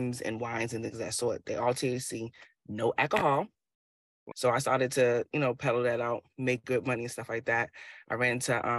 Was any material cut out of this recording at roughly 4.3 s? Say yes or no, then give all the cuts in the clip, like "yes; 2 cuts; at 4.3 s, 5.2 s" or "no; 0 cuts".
yes; 1 cut; at 4.3 s